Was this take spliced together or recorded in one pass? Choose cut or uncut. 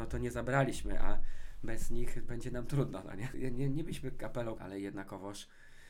cut